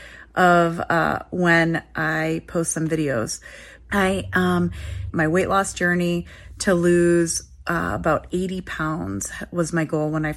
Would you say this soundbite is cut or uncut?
cut